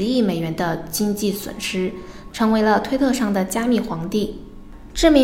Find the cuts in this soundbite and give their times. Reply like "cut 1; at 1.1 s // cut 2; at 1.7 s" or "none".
cut 1; at 2.3 s